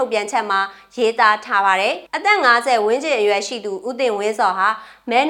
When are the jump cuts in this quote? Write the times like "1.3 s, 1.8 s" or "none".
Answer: 2.1 s